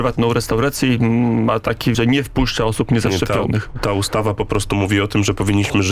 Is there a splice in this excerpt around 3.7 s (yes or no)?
no